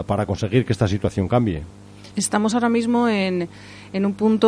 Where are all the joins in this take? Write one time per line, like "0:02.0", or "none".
0:02.1

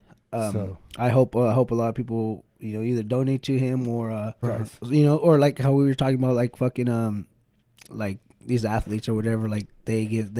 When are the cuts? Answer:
0:04.4

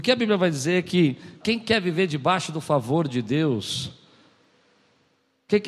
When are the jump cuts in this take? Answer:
0:01.4

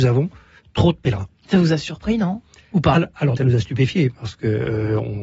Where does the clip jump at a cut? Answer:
0:03.4

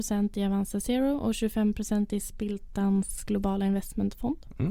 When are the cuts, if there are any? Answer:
none

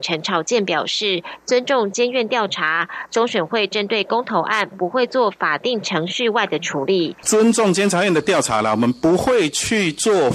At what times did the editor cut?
0:07.2

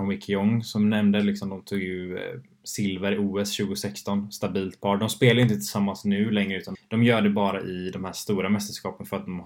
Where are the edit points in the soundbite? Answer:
0:06.7

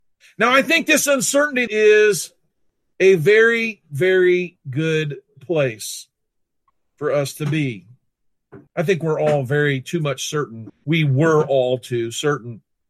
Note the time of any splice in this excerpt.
0:01.7
0:08.7
0:10.7

